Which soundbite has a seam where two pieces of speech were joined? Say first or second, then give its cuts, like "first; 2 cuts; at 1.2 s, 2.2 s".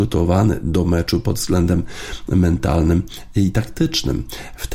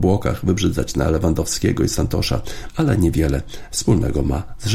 second; 1 cut; at 2.7 s